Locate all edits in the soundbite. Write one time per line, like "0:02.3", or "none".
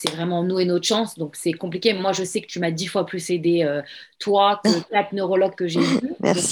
none

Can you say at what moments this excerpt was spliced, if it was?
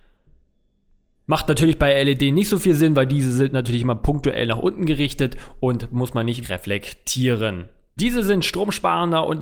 0:06.4
0:08.0

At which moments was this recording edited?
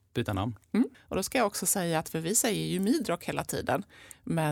0:00.9

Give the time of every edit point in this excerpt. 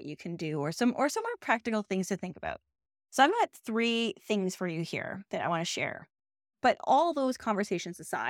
0:06.4

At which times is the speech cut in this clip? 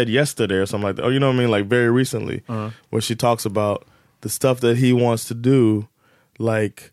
none

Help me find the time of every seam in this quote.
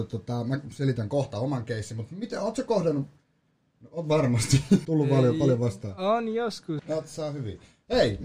0:04.8
0:06.8

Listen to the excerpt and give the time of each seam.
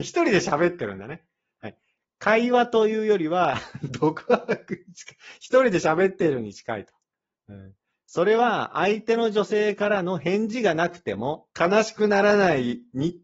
0:11.5

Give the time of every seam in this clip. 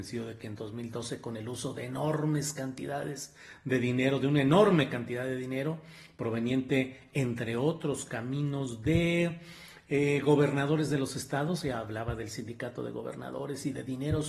none

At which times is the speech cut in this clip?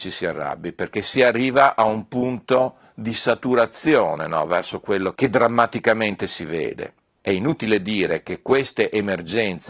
0:07.2

